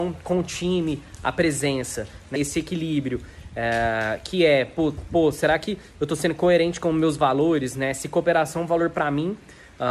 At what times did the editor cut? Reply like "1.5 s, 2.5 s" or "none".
2.4 s